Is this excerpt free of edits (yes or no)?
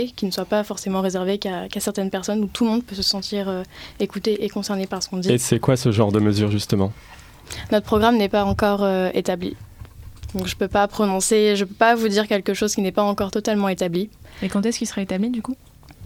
yes